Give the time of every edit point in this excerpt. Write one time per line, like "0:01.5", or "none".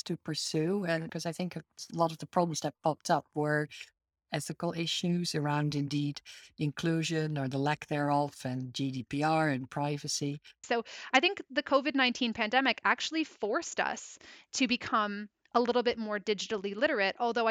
0:01.1
0:10.6

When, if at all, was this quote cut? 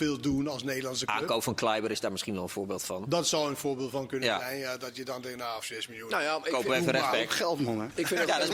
0:05.6

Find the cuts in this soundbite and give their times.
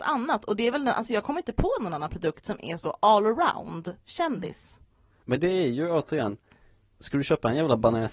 none

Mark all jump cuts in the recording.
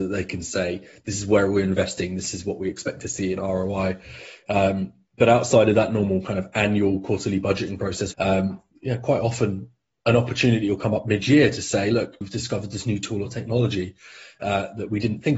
0:08.1
0:12.2

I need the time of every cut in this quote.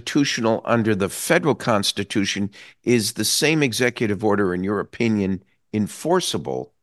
none

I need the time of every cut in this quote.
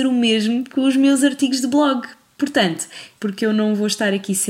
0:03.2

